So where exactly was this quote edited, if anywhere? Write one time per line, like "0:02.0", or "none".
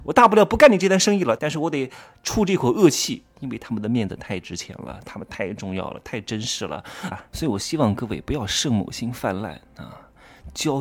0:01.4
0:07.1